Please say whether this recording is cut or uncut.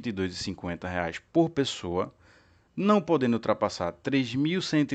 uncut